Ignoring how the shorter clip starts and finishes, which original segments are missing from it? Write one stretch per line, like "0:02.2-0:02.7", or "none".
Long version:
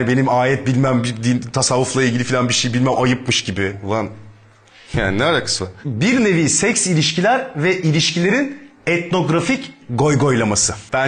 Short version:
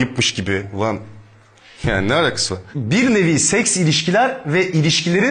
none